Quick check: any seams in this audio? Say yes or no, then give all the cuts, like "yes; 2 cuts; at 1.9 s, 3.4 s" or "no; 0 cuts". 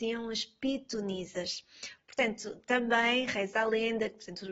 yes; 1 cut; at 2.0 s